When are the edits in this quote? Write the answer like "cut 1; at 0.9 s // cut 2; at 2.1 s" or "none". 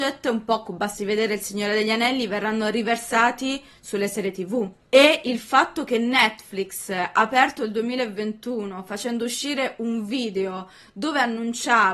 cut 1; at 4.8 s